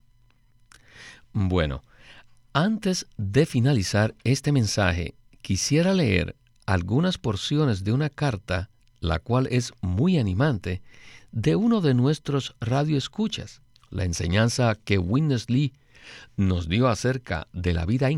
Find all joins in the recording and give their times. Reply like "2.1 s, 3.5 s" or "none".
13.8 s